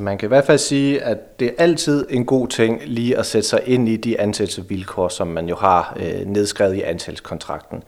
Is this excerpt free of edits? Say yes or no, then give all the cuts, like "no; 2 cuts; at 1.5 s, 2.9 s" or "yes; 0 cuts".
yes; 0 cuts